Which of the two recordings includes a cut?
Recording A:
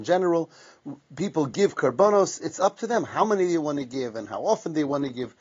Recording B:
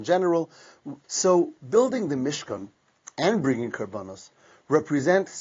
B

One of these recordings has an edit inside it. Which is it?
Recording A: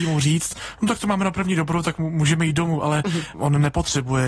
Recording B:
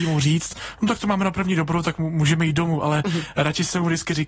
A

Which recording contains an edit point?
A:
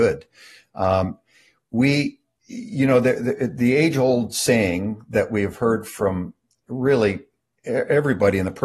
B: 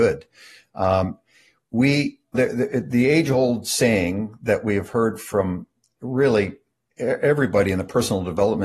B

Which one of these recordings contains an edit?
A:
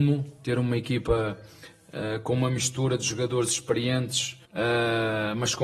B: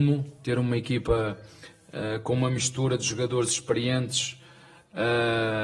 A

